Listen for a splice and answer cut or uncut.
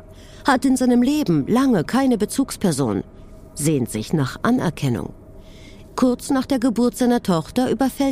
cut